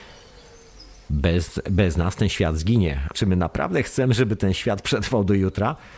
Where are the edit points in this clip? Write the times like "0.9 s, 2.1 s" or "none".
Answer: 1.1 s, 3.1 s